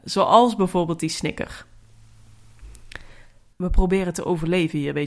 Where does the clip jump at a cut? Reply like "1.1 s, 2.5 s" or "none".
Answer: 3.5 s